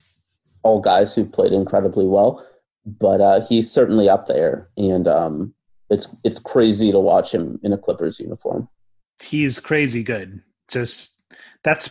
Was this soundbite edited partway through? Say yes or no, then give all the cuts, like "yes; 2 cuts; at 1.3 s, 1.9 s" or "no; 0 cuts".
no; 0 cuts